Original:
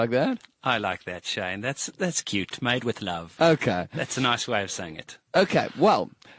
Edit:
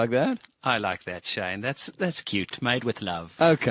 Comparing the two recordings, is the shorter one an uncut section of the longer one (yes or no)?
yes